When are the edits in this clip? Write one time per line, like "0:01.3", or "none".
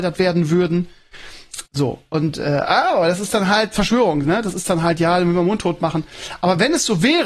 0:01.7

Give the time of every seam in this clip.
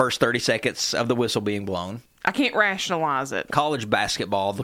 0:02.1
0:03.5

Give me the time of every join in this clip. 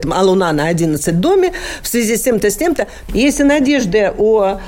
0:03.1

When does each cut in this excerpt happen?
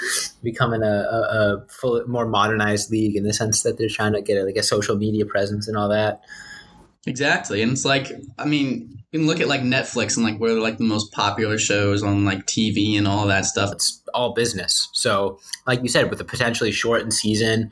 0:13.7

